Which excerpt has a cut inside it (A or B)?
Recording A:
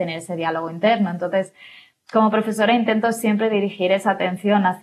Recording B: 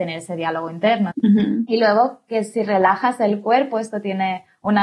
B